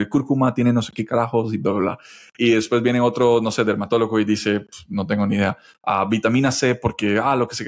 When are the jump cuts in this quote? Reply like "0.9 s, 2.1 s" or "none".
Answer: none